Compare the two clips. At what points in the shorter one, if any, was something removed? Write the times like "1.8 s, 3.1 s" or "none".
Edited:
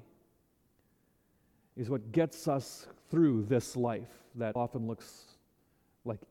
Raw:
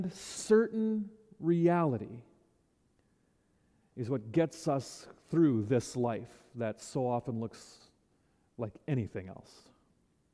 4.6 s